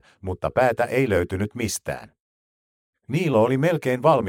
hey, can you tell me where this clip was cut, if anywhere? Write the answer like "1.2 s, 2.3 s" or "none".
none